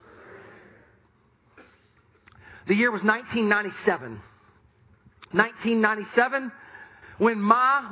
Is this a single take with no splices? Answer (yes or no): no